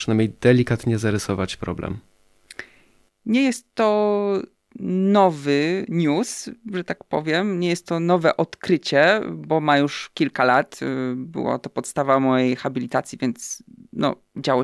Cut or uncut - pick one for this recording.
uncut